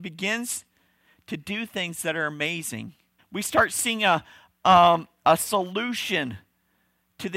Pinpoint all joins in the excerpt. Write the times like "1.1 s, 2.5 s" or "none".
3.2 s